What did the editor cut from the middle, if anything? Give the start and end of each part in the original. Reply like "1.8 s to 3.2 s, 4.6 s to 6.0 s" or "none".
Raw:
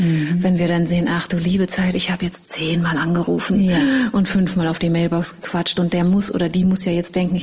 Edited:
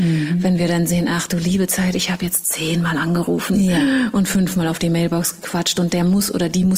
none